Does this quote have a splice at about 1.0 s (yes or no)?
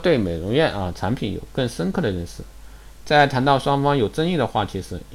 no